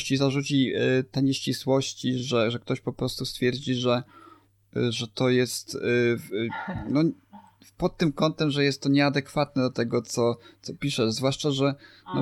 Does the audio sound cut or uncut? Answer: uncut